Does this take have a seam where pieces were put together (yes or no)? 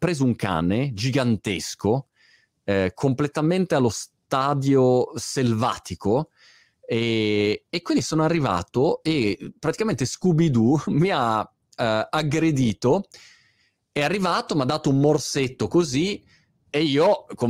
no